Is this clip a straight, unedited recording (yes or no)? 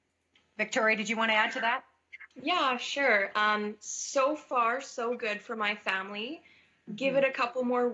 yes